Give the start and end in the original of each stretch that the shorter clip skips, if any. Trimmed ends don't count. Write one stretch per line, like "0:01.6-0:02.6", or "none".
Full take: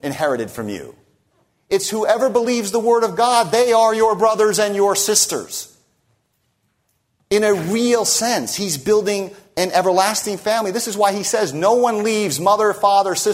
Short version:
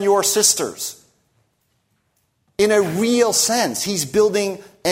none